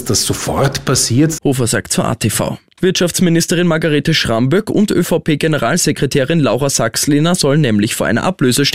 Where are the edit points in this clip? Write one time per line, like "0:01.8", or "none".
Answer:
0:01.4
0:02.8